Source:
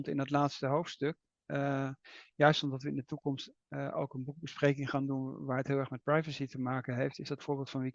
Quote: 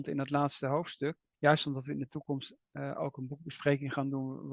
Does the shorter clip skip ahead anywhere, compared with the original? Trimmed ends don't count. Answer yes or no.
yes